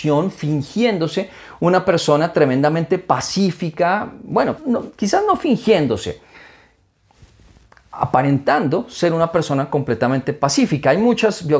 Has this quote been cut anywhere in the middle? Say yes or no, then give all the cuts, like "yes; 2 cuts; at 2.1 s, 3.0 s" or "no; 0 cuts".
yes; 1 cut; at 4.6 s